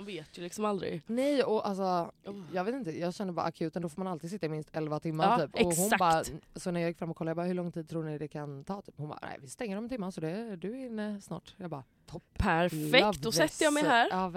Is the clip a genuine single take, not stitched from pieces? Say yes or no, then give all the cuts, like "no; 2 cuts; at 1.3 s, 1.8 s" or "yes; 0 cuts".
no; 1 cut; at 11.9 s